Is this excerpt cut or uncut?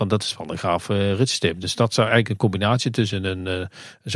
uncut